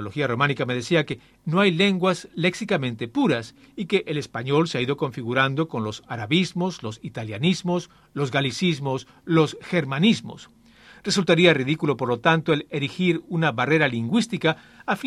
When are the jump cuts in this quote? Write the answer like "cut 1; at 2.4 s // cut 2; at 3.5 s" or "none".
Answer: none